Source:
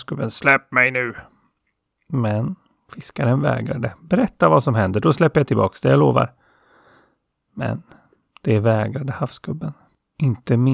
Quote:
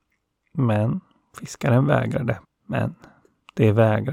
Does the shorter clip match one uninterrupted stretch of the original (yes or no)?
no